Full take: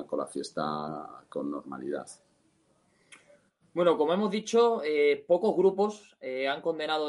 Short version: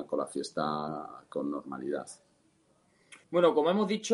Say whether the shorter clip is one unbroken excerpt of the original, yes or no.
no